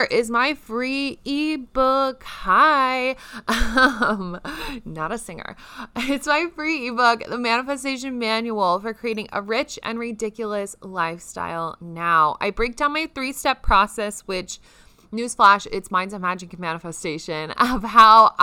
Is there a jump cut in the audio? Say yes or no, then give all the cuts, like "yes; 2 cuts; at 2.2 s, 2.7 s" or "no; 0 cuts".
no; 0 cuts